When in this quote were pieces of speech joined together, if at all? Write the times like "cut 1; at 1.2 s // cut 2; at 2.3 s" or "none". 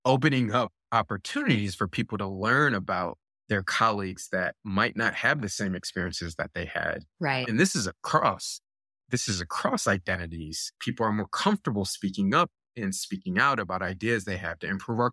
cut 1; at 7.4 s // cut 2; at 10.8 s